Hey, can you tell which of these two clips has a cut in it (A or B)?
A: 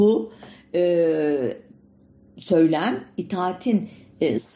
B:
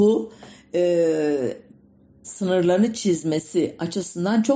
B